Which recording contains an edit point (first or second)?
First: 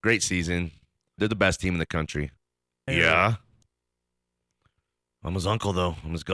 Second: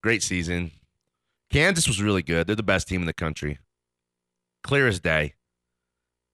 first